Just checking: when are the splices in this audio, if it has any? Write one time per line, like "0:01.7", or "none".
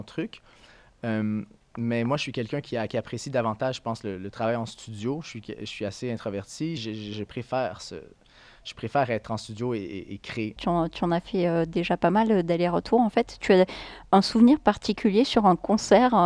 0:06.8
0:10.6